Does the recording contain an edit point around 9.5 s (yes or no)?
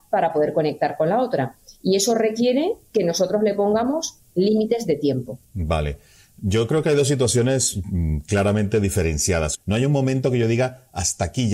yes